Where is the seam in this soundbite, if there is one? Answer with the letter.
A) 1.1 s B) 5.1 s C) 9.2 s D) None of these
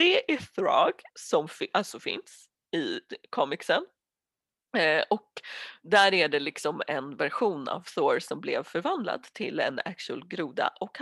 A